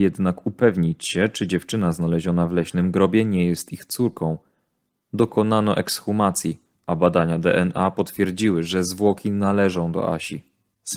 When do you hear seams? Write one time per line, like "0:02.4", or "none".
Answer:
none